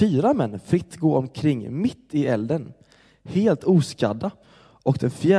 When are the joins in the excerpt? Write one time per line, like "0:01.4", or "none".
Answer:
none